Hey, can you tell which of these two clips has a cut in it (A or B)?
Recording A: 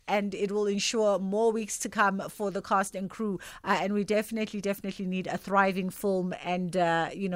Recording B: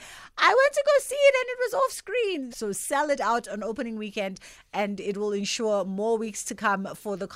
B